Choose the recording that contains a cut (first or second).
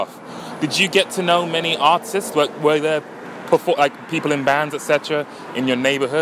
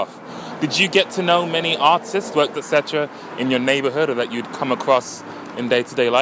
second